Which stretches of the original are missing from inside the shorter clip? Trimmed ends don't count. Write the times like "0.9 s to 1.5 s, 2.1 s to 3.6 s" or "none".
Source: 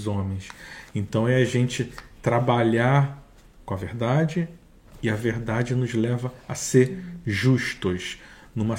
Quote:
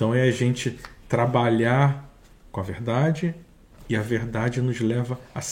none